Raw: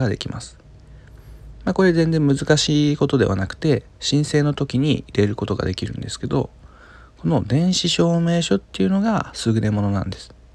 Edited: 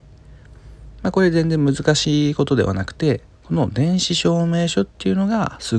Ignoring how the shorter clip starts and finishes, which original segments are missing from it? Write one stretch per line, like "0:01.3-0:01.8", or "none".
0:04.0-0:07.1